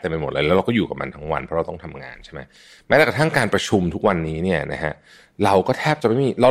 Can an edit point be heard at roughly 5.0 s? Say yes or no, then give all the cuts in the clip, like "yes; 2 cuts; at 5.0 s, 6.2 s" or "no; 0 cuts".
no; 0 cuts